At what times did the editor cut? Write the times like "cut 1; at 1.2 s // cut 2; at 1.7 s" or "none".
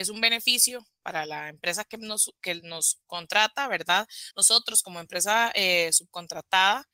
none